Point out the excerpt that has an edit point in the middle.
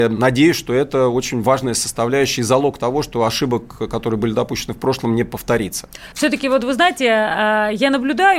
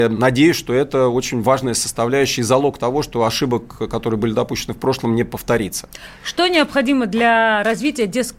first; 1 cut; at 6.1 s

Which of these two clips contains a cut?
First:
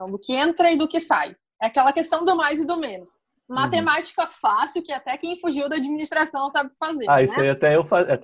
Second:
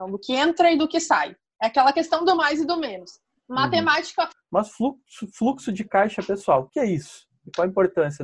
second; 2 cuts; at 4.3 s, 6.7 s

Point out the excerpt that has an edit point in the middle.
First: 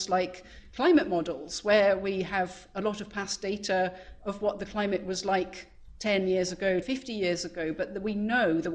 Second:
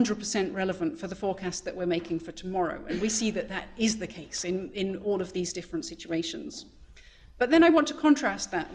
first; 1 cut; at 6.8 s

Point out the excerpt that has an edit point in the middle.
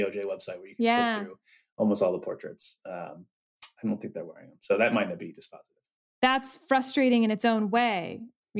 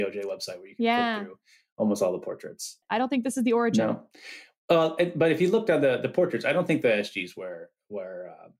second; 1 cut; at 2.8 s

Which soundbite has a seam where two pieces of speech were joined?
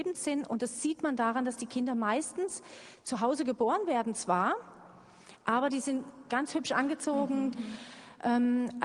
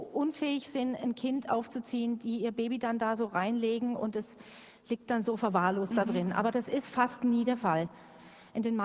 first; 1 cut; at 7.5 s

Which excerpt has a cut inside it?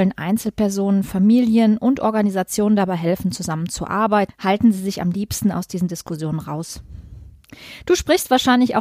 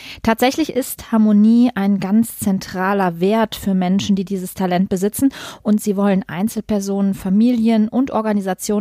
first; 1 cut; at 4.3 s

